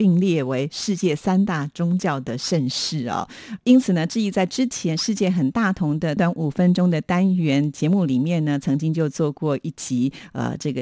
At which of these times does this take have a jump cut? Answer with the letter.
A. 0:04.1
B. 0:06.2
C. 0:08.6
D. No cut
B